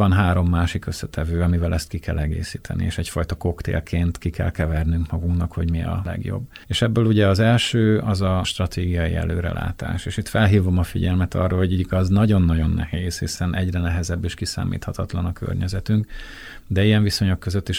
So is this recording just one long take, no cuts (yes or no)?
yes